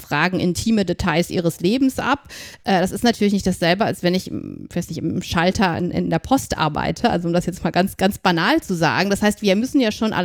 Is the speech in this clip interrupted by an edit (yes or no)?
no